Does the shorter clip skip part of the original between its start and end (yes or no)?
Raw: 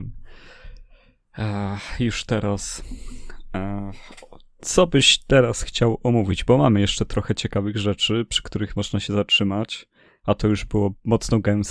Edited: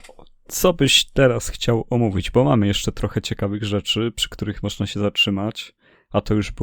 no